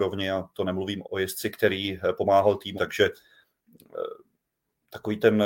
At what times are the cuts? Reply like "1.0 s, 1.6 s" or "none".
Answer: 1.0 s, 2.8 s